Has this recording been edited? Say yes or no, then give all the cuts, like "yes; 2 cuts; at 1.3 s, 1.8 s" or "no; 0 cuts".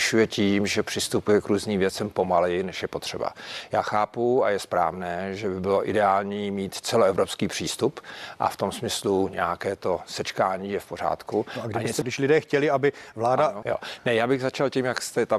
yes; 2 cuts; at 12.0 s, 13.6 s